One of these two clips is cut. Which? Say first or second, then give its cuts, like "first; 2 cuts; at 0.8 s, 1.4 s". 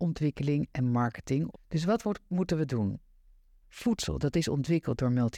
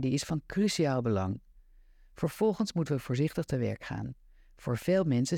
first; 2 cuts; at 1.5 s, 3.6 s